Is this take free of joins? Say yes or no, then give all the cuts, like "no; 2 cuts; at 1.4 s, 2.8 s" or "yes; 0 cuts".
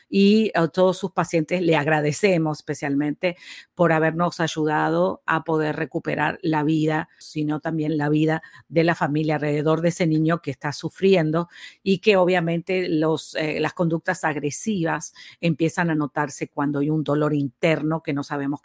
no; 1 cut; at 7.2 s